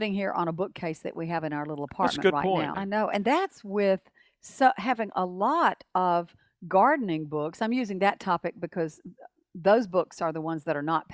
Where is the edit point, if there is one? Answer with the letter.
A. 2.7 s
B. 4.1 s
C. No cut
A